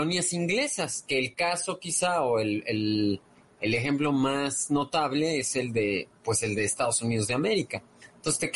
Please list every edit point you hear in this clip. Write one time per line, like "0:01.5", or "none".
none